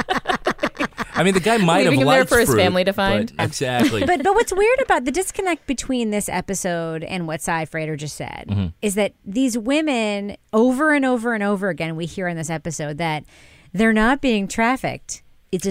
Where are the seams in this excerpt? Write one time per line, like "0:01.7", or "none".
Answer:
0:03.4